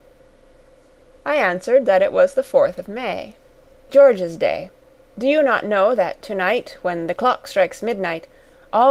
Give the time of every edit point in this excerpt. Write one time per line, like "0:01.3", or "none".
0:03.9